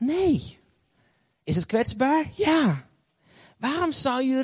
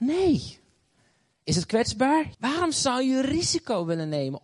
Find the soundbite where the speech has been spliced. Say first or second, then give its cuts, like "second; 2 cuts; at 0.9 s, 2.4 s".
second; 1 cut; at 2.3 s